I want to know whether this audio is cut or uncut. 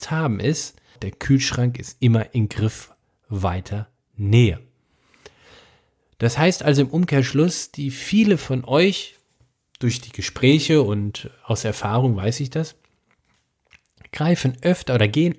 cut